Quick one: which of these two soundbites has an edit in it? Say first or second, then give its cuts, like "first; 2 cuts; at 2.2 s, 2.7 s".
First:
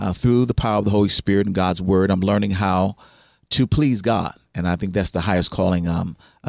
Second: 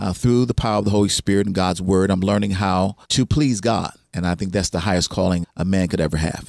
second; 2 cuts; at 3.0 s, 5.4 s